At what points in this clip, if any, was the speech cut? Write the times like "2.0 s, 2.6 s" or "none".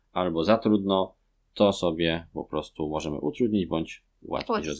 none